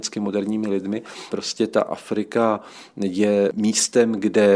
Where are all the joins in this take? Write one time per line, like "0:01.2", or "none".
0:01.3